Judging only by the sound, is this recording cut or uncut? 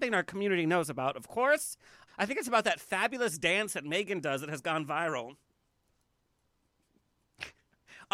cut